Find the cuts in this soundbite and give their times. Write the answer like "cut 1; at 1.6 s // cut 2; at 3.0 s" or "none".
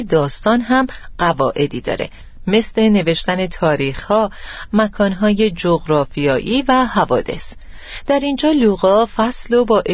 cut 1; at 4.7 s